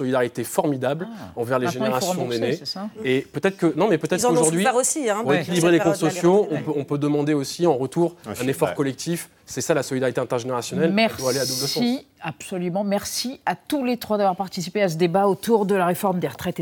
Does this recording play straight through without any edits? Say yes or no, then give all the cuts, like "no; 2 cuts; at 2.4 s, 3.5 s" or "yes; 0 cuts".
yes; 0 cuts